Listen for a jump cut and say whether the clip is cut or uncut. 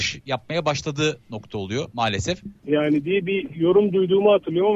cut